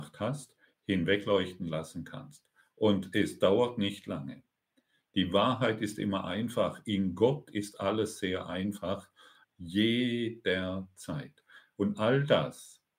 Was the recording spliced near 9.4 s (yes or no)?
yes